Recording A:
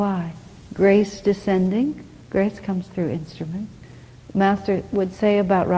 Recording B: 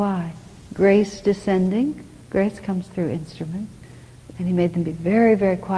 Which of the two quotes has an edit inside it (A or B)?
B